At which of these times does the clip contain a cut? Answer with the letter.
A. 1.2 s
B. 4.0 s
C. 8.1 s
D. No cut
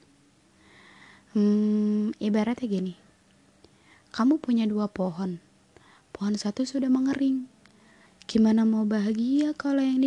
C